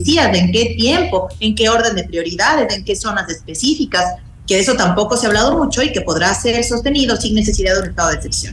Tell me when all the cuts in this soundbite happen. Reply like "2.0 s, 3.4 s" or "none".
4.4 s